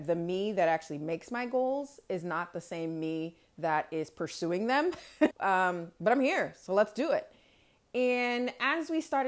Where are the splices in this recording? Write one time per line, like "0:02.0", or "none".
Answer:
0:05.3